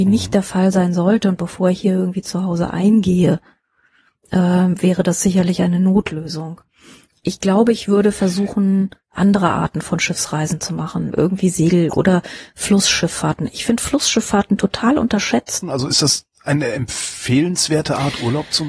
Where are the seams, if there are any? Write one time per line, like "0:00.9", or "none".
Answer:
0:11.1
0:15.6